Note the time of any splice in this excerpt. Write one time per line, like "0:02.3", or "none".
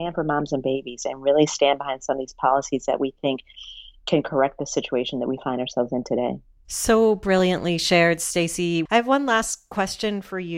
0:08.9